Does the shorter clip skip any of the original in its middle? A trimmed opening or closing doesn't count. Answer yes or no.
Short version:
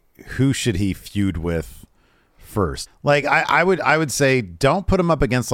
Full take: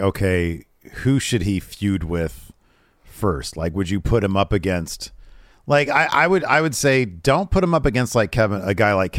yes